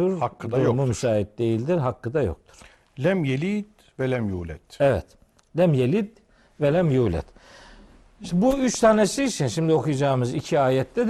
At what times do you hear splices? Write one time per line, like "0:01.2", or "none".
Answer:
none